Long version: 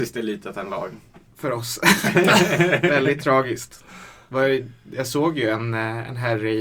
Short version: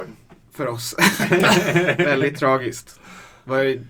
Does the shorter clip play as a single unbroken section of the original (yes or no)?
yes